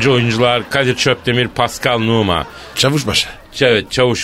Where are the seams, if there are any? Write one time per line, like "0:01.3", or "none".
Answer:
none